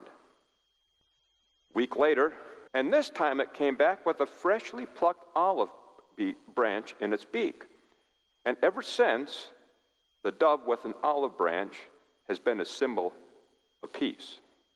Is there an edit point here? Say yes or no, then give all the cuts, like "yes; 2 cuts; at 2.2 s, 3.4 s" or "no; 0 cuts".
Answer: yes; 1 cut; at 2.7 s